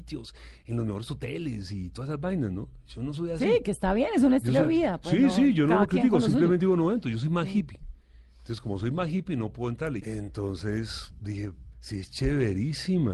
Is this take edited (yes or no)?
yes